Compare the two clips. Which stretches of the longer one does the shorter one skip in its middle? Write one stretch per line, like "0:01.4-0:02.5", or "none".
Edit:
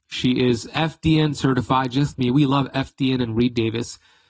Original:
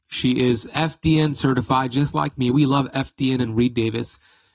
0:02.1-0:02.3